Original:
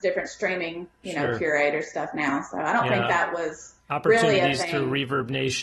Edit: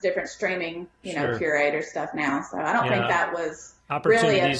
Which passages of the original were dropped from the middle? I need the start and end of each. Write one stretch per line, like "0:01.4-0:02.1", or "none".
none